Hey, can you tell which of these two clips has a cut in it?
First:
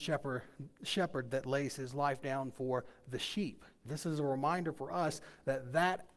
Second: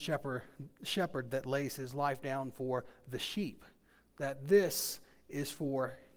first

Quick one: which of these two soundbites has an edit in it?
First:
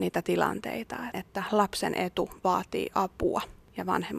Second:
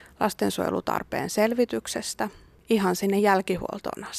first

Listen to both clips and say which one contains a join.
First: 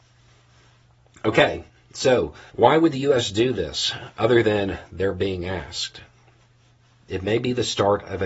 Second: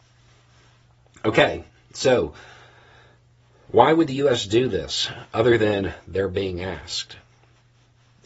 first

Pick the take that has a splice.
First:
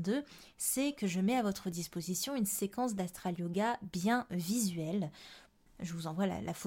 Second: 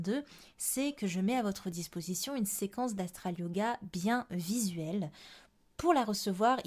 first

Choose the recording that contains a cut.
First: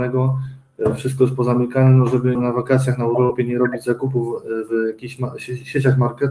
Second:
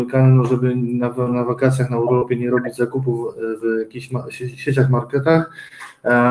first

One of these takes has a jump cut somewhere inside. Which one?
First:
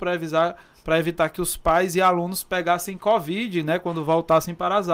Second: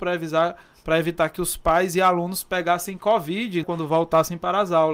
second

